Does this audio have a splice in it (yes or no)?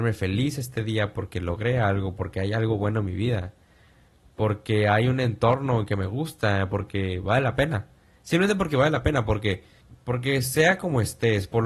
no